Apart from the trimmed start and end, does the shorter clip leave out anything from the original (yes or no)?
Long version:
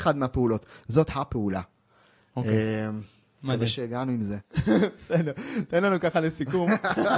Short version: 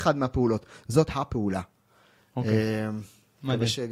no